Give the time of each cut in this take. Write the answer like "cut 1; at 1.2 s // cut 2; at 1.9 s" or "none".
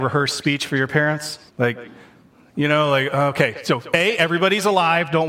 cut 1; at 1.5 s